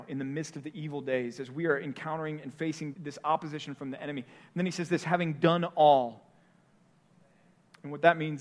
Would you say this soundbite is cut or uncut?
cut